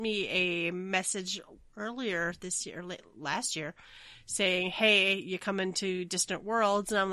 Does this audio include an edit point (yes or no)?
no